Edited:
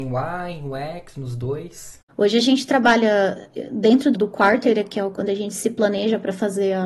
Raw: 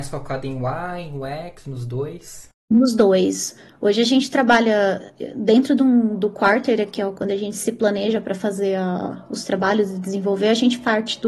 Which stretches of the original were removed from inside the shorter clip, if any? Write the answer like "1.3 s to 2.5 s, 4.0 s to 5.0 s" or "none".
2.6 s to 3.7 s, 5.8 s to 6.2 s